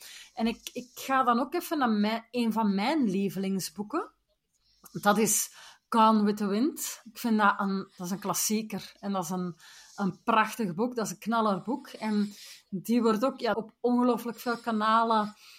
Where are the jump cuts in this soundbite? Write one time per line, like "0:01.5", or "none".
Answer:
0:13.5